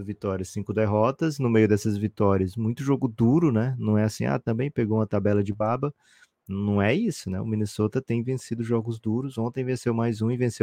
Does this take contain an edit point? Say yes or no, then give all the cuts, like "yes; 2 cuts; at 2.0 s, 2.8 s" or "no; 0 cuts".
no; 0 cuts